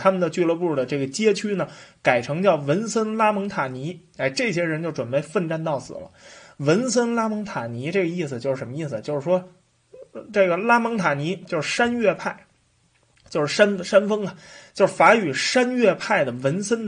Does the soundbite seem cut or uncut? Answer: uncut